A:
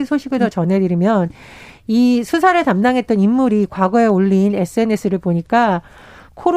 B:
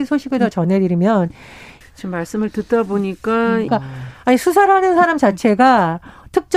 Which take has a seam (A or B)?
B